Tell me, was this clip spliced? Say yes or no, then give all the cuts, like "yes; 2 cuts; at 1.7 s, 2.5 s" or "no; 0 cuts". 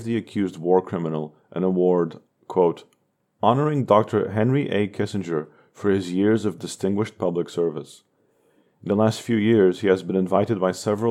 no; 0 cuts